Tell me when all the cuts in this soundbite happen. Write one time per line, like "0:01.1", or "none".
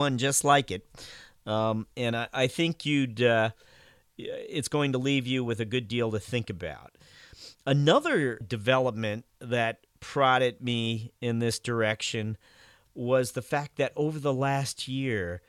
0:08.4